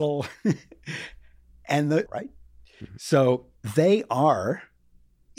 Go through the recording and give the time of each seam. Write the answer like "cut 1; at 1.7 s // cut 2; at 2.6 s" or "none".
cut 1; at 2.1 s // cut 2; at 3.6 s